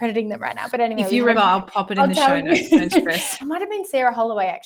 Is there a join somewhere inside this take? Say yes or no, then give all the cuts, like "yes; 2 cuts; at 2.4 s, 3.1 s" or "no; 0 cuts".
yes; 2 cuts; at 1.3 s, 3.4 s